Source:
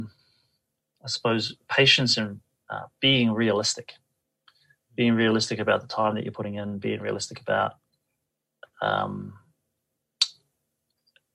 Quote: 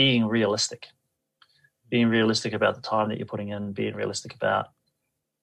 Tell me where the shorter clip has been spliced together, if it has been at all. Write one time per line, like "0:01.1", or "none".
none